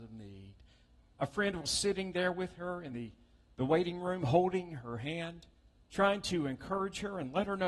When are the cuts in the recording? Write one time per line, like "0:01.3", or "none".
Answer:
none